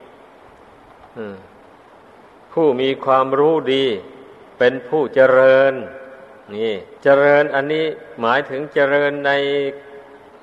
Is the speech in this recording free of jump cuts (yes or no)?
no